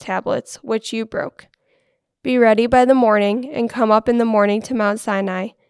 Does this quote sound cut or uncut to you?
uncut